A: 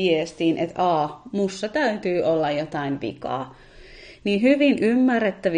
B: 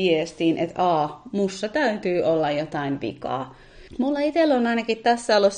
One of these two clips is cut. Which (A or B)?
B